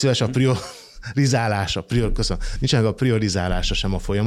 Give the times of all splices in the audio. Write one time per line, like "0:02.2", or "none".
none